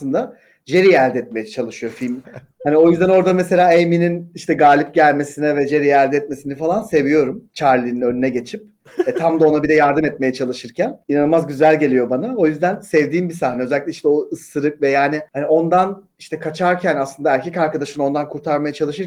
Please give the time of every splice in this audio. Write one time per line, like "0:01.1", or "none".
0:02.2